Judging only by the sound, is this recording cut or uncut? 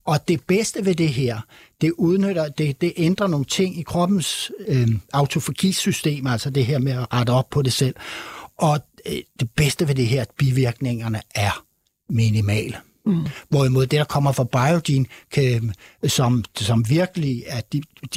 cut